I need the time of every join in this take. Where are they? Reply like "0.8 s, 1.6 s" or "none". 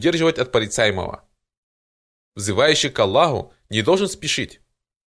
2.1 s